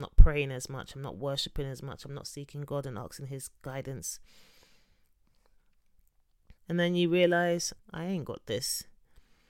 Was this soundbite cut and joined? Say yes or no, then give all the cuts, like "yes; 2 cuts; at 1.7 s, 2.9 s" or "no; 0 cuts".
yes; 2 cuts; at 6.6 s, 7.8 s